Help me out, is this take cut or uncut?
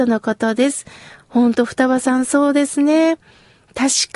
uncut